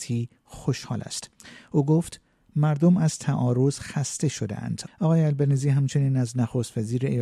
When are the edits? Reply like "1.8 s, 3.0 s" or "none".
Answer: 4.9 s